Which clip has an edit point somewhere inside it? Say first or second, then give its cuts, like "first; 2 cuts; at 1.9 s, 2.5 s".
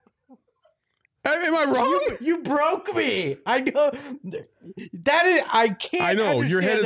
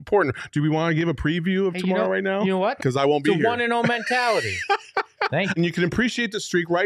second; 2 cuts; at 2.8 s, 5.6 s